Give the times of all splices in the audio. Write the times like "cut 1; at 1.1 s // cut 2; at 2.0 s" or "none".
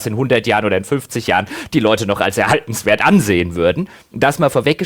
none